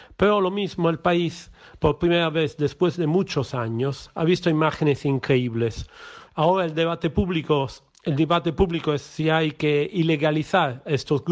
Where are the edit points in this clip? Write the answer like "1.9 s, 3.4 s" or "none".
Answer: none

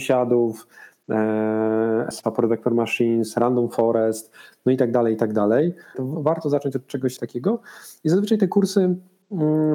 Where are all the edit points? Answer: 2.1 s, 5.9 s, 7.2 s

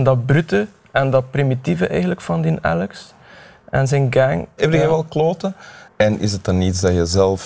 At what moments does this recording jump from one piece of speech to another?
4.6 s, 5.9 s

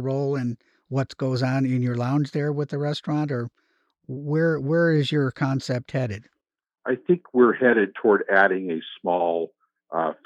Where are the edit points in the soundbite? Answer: none

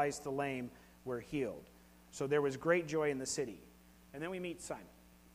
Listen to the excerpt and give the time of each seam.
none

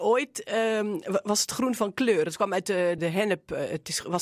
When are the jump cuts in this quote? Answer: 3.0 s

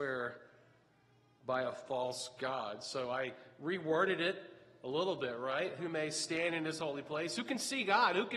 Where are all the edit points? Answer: 5.8 s

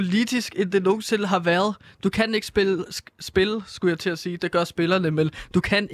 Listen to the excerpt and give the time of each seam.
none

